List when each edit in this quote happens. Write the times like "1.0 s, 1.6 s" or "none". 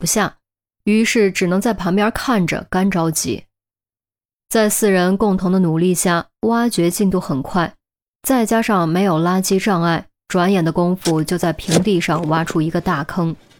none